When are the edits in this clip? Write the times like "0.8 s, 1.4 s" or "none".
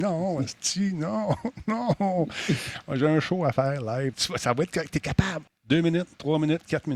4.1 s, 5.5 s